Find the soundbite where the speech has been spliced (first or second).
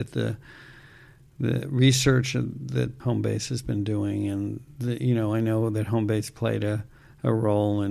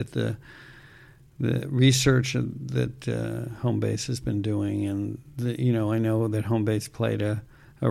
first